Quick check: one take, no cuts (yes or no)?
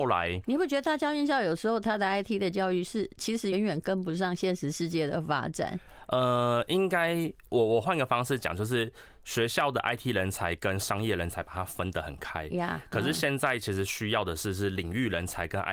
no